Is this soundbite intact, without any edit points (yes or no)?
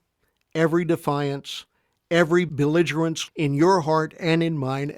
no